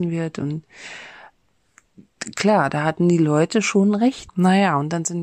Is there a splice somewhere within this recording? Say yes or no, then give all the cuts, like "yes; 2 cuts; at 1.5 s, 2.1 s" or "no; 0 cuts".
yes; 1 cut; at 4.3 s